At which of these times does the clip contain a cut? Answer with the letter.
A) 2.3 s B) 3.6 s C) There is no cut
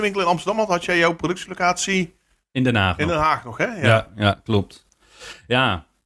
C